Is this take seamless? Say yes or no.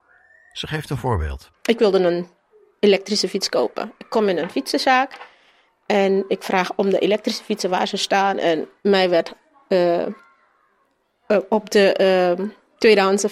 yes